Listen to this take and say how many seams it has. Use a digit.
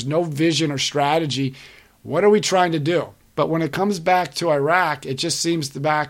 1